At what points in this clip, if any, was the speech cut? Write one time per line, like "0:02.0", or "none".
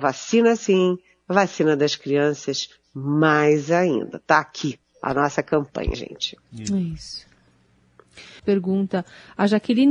0:05.9
0:08.4